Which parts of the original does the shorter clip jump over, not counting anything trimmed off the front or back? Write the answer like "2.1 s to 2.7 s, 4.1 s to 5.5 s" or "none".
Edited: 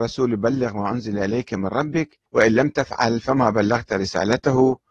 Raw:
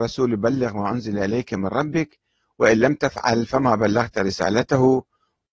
2.3 s to 2.5 s